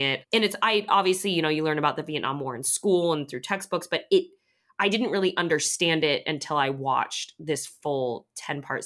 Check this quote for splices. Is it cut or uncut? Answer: uncut